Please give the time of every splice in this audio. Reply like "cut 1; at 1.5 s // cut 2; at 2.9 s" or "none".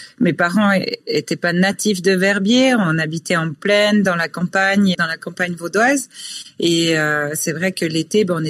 cut 1; at 4.9 s